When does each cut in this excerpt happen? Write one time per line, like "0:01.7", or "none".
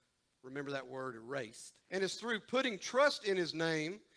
0:01.8